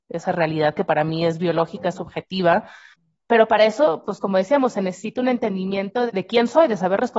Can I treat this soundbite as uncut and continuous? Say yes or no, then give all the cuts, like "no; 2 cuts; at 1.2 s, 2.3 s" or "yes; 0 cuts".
no; 1 cut; at 6.1 s